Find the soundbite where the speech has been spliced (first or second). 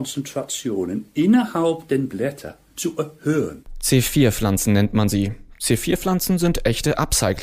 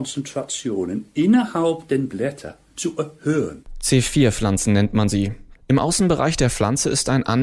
second